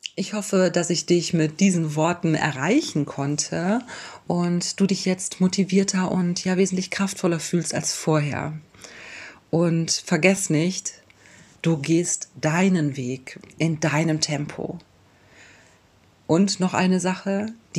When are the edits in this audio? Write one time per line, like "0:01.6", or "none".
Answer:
0:11.5